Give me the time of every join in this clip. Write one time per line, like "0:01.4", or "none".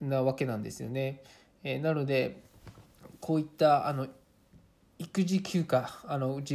none

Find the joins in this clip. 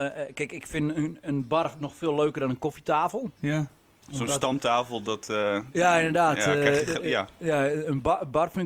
none

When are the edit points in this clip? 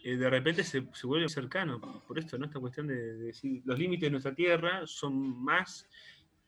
0:01.3

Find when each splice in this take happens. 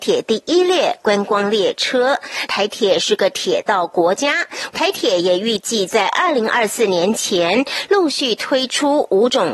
0:02.5
0:04.7

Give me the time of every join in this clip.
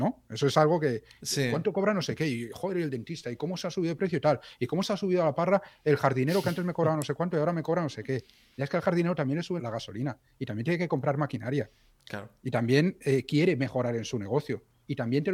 0:09.6

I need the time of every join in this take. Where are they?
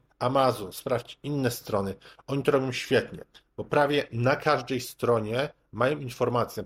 none

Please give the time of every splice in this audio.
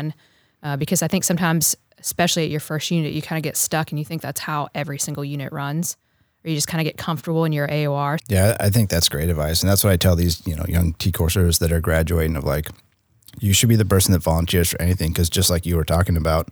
0:08.2

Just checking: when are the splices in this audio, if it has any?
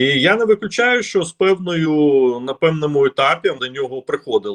0:03.6

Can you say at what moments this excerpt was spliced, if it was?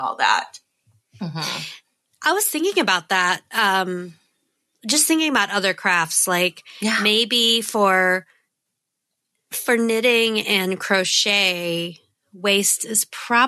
none

